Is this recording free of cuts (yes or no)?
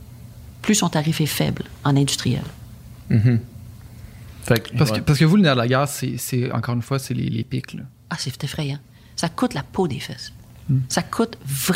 yes